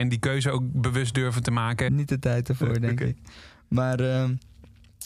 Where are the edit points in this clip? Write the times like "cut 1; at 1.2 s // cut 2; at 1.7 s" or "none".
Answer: cut 1; at 1.9 s

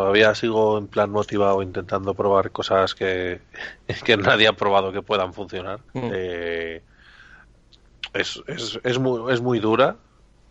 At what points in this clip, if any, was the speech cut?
cut 1; at 5.9 s

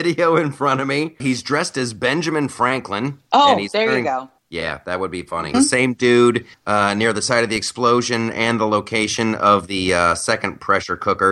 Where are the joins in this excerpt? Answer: cut 1; at 1.2 s // cut 2; at 5.5 s

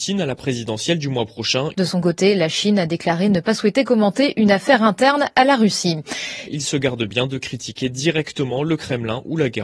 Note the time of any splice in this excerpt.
cut 1; at 1.7 s // cut 2; at 6.5 s

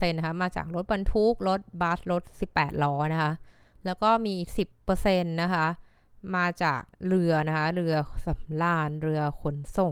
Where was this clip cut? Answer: cut 1; at 4.7 s // cut 2; at 6.9 s

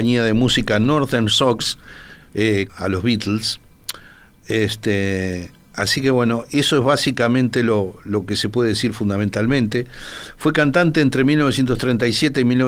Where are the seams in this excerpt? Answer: cut 1; at 2.7 s

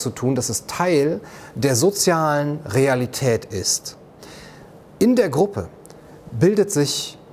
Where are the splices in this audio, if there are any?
none

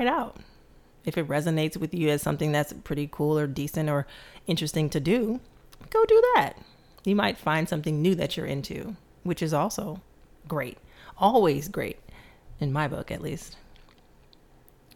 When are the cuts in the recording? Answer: none

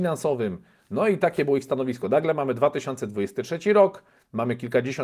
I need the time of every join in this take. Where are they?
none

